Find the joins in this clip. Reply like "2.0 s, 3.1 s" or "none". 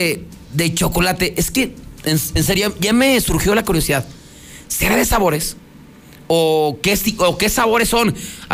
none